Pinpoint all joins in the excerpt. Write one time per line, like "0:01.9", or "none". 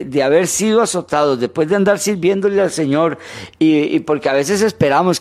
none